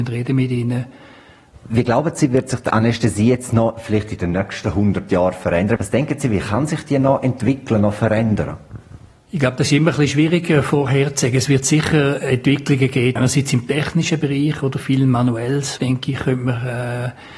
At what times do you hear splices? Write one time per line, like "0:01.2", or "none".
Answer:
0:05.8
0:13.2
0:15.8